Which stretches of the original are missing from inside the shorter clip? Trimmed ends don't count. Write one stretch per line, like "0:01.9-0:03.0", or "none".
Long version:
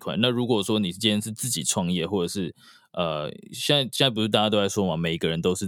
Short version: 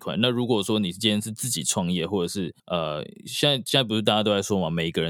0:02.6-0:02.9